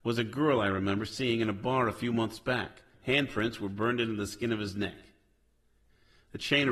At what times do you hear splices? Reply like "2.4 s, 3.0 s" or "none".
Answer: 2.9 s